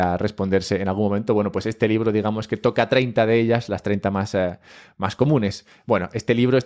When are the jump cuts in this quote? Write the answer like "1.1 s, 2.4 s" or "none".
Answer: none